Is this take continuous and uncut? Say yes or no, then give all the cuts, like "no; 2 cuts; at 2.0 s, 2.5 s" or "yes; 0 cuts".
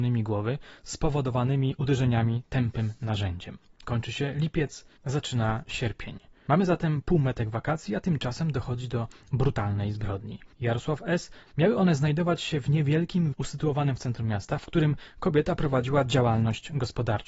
no; 3 cuts; at 3.7 s, 11.5 s, 13.3 s